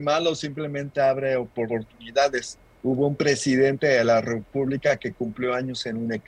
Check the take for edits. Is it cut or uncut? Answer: uncut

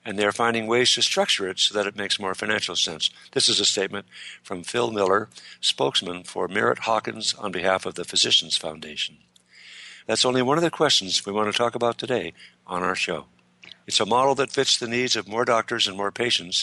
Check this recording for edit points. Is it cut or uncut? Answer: cut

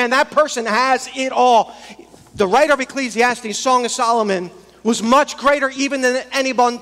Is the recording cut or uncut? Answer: uncut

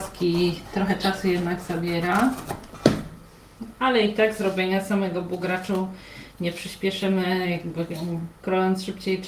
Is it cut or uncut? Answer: uncut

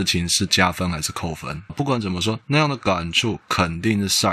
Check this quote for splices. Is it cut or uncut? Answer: cut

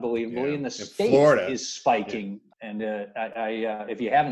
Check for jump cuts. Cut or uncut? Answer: cut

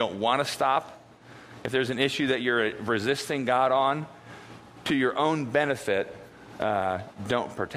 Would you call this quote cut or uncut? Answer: uncut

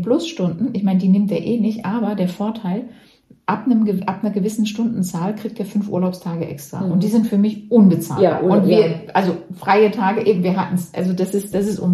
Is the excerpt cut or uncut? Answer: uncut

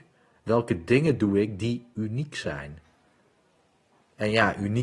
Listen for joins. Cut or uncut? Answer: uncut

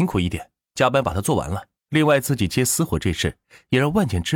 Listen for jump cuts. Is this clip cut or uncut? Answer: cut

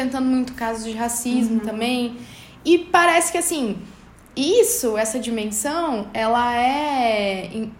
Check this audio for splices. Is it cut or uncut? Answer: uncut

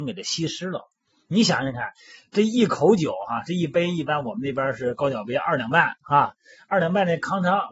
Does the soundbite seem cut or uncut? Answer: uncut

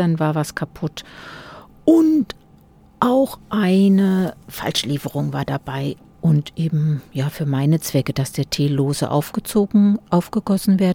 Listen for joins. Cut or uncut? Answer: cut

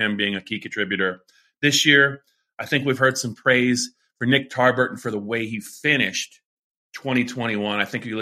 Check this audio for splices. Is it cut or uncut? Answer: uncut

